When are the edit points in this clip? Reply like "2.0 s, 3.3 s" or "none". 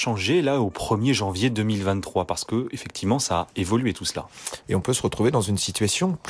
4.6 s